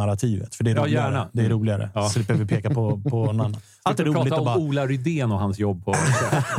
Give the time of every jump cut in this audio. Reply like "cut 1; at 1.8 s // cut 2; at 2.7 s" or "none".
none